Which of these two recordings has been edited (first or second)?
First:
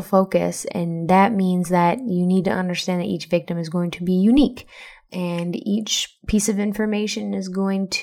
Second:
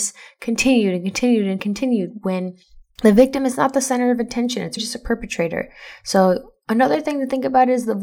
second